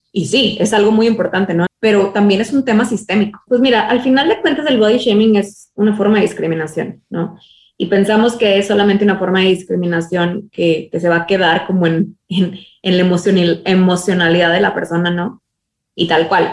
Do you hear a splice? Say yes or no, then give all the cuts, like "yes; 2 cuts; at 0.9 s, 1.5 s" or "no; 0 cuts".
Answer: yes; 2 cuts; at 1.7 s, 3.5 s